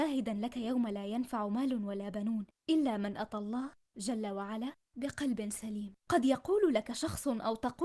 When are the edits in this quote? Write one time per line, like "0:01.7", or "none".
0:06.0